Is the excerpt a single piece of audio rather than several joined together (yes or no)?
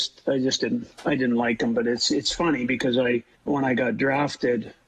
no